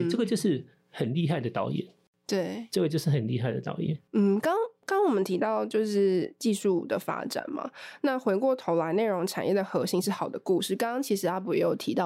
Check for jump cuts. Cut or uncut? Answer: uncut